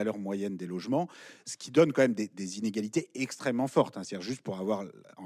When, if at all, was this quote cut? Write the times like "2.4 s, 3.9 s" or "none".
none